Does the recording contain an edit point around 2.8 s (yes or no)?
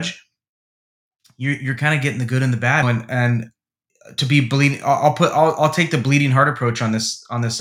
yes